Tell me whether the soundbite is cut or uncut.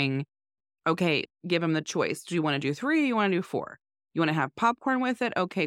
cut